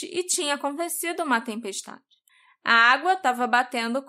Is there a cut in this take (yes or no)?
no